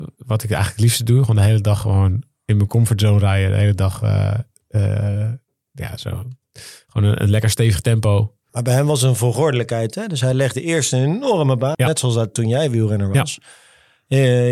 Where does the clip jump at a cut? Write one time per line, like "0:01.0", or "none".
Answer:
0:08.5
0:11.7

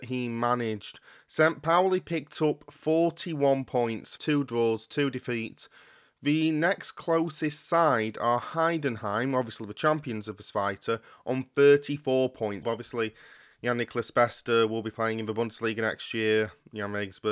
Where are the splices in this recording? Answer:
0:04.2
0:12.6

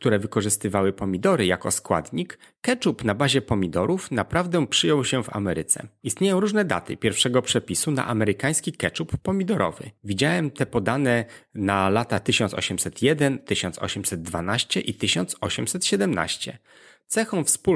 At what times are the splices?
none

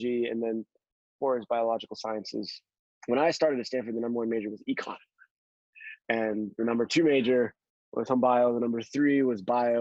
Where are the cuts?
0:06.0

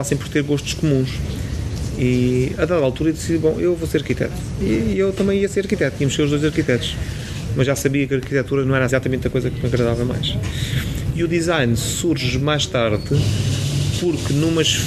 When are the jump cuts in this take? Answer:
0:07.5
0:08.9

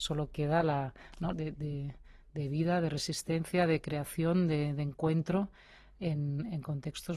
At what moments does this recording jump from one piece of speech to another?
0:01.3

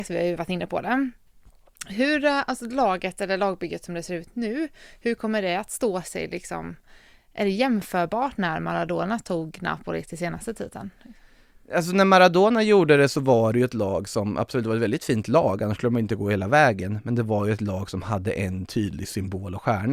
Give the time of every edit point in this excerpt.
none

